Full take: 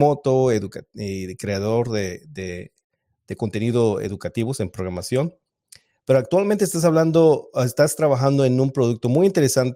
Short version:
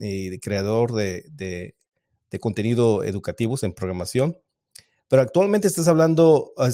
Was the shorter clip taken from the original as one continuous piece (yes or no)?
yes